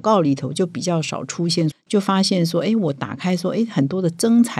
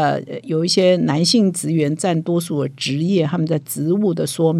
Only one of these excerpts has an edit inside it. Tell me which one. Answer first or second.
first